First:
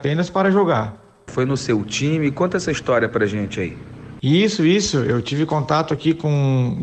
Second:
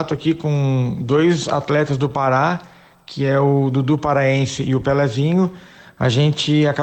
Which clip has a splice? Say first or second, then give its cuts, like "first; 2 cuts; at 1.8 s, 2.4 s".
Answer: first; 1 cut; at 1.3 s